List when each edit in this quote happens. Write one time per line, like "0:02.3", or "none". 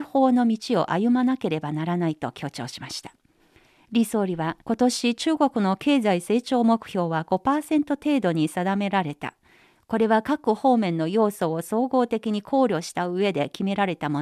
0:04.6